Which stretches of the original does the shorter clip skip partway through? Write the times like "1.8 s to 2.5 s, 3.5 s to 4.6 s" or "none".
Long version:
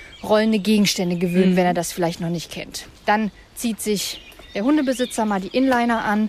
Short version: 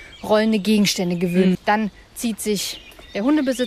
1.5 s to 3.0 s